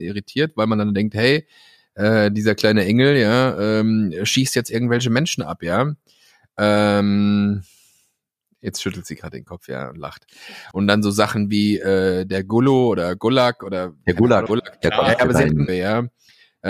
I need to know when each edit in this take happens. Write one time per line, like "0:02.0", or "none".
0:10.7
0:14.5
0:15.7